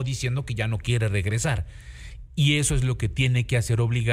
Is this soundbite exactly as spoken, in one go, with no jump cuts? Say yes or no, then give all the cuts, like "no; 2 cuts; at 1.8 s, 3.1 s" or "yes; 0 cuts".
no; 1 cut; at 2.3 s